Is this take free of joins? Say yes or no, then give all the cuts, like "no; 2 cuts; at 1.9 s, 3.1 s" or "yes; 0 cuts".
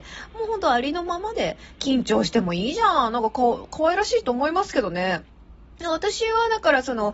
yes; 0 cuts